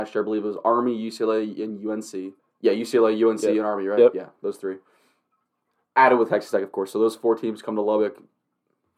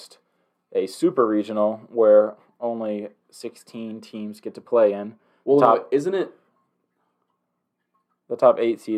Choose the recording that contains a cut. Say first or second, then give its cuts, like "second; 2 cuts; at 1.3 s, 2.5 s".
first; 1 cut; at 2.4 s